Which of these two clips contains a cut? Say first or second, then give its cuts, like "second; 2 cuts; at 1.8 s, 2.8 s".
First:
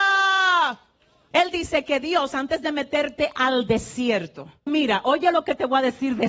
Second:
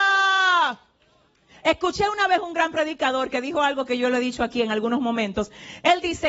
first; 2 cuts; at 1.3 s, 4.7 s